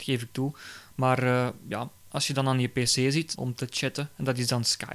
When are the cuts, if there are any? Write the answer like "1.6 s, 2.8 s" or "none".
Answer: 3.4 s